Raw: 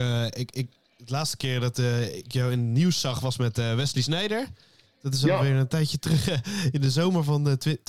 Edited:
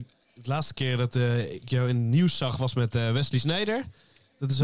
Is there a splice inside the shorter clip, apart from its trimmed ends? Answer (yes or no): no